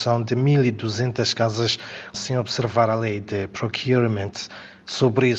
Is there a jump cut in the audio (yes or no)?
yes